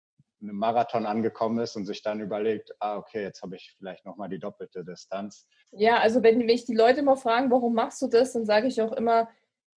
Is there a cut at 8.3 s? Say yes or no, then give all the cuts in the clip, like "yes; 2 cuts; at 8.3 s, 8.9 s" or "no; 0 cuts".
no; 1 cut; at 5.6 s